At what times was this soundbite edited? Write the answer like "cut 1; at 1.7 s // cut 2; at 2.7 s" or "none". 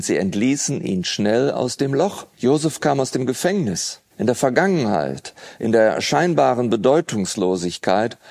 cut 1; at 2.3 s // cut 2; at 4.1 s // cut 3; at 5.6 s